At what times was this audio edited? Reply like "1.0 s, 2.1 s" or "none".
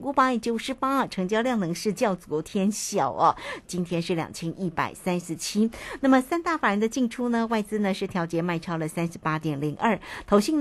3.6 s